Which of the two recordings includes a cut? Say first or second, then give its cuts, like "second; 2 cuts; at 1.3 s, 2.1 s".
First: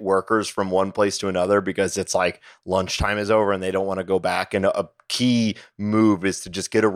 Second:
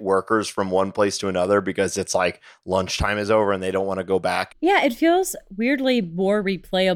second; 1 cut; at 4.5 s